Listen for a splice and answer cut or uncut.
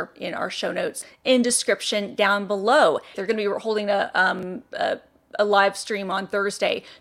cut